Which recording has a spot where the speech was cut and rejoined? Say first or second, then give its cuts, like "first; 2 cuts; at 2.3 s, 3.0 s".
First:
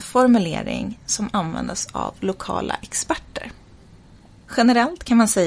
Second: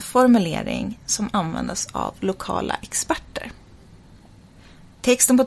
first; 1 cut; at 4.4 s